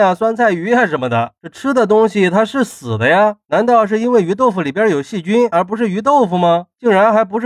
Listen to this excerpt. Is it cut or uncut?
cut